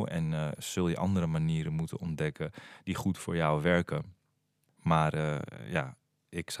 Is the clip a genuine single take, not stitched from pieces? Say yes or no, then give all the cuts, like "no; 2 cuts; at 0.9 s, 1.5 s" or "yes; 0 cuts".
no; 1 cut; at 4.8 s